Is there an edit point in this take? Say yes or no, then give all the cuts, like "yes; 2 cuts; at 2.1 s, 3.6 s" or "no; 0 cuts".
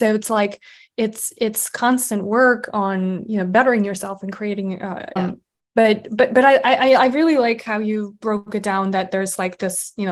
yes; 1 cut; at 5.2 s